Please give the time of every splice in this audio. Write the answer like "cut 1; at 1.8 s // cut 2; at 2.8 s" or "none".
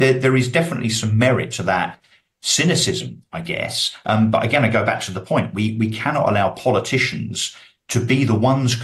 none